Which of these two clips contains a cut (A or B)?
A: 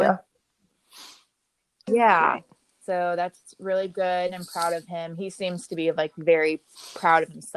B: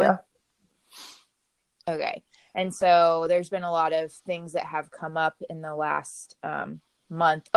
A